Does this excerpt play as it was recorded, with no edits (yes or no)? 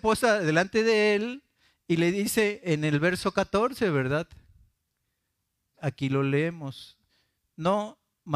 no